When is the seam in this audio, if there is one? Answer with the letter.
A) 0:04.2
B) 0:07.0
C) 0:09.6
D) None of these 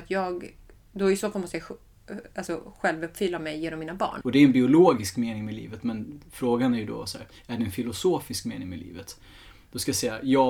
A